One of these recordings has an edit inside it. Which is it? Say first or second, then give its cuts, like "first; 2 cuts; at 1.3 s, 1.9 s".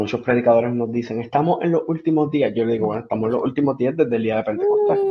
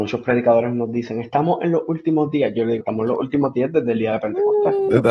second; 1 cut; at 2.8 s